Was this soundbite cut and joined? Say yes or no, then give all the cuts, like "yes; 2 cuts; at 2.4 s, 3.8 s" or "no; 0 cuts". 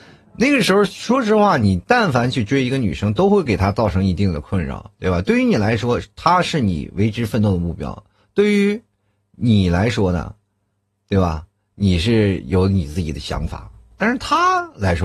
no; 0 cuts